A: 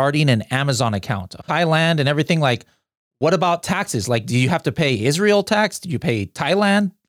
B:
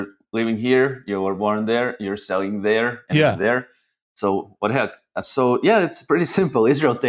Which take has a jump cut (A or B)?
A